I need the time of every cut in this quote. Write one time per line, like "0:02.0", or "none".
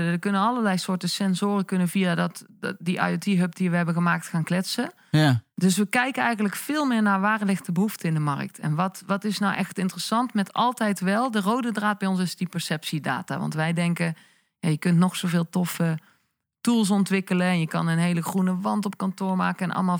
none